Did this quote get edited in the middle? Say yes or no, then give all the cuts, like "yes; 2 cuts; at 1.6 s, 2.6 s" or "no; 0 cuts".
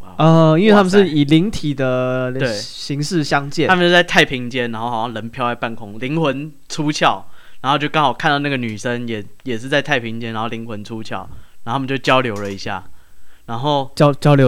no; 0 cuts